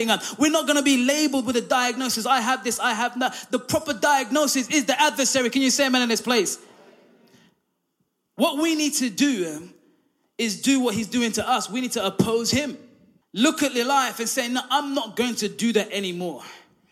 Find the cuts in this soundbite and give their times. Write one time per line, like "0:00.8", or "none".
0:13.2

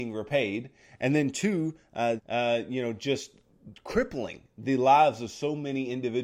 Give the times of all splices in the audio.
0:02.2

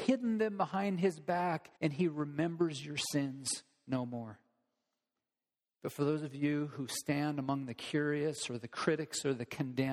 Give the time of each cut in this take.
0:01.8

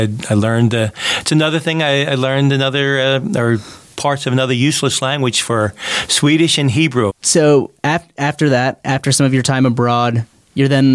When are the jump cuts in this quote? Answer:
0:07.1

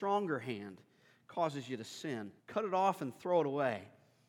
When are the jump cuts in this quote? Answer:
0:02.4

